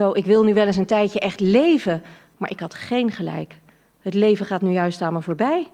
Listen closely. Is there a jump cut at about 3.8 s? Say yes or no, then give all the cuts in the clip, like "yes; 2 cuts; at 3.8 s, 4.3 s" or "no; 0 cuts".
no; 0 cuts